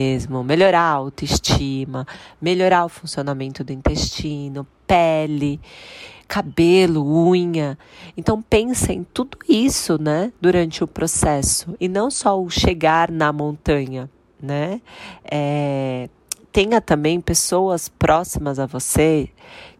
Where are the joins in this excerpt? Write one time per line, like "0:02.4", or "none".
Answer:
0:11.8